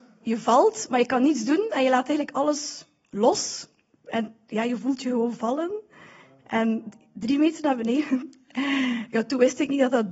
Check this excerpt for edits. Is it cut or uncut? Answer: uncut